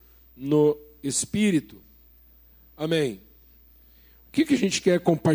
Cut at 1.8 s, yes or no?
no